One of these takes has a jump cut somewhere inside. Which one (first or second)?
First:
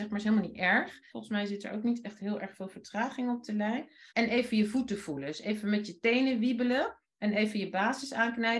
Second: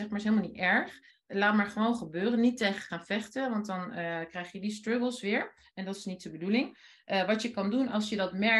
first